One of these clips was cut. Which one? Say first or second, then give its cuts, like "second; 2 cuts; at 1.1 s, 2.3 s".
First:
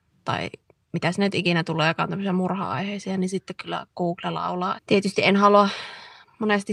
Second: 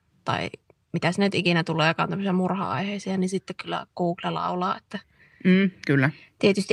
first; 1 cut; at 4.8 s